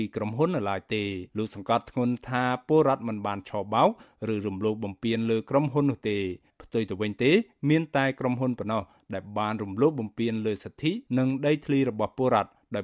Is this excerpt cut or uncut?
cut